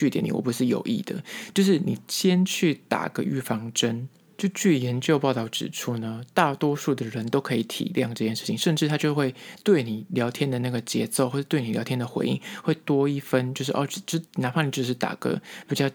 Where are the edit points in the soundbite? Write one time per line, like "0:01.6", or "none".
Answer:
none